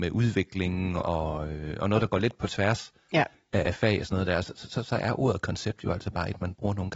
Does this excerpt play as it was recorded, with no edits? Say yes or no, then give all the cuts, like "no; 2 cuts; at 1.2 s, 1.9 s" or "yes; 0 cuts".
yes; 0 cuts